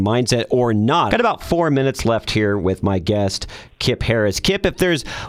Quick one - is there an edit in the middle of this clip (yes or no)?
yes